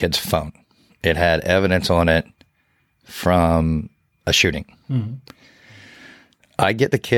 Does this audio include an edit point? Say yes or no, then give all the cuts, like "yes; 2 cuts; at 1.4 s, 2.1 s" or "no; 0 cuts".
no; 0 cuts